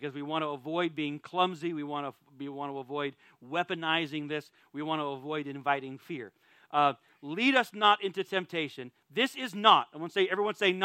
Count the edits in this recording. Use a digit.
0